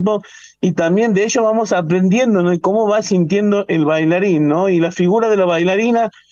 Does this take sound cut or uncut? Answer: uncut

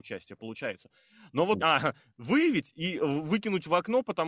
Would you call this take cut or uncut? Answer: cut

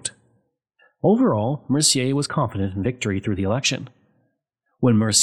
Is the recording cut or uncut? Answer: cut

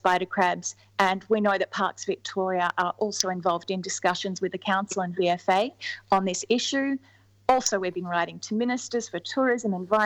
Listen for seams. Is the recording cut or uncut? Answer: uncut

